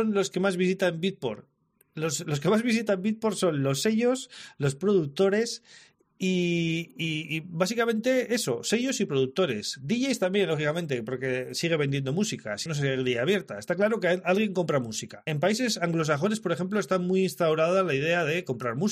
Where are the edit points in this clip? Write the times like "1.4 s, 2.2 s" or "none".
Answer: 12.7 s